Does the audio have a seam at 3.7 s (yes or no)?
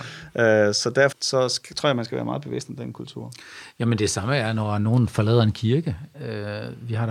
no